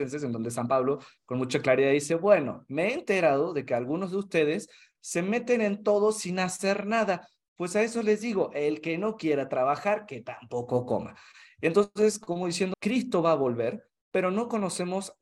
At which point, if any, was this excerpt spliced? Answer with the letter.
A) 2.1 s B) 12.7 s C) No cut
B